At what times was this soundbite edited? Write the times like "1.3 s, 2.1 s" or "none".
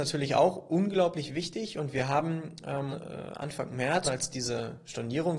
2.9 s, 4.0 s